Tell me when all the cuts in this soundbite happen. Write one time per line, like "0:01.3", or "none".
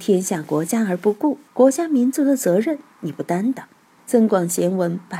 0:01.5
0:04.0

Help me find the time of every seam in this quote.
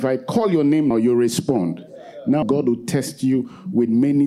0:00.9
0:02.4

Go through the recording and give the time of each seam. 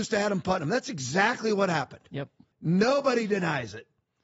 0:02.5

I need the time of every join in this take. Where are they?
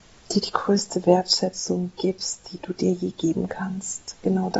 none

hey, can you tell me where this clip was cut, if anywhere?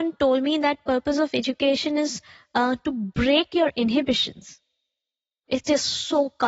0:05.4

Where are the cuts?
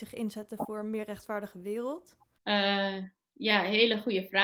0:02.4

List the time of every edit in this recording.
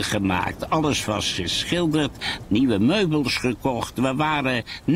0:02.4

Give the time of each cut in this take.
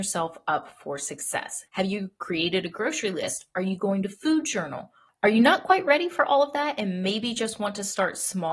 0:01.7

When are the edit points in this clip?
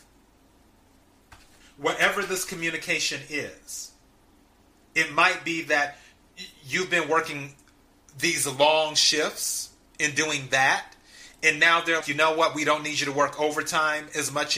0:01.6
0:12.0

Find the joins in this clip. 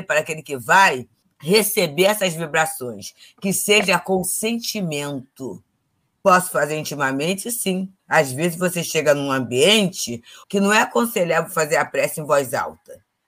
0:08.0
0:10.4

